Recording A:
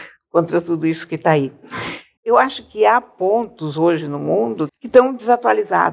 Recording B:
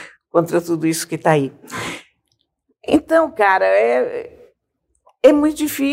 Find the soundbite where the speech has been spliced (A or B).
A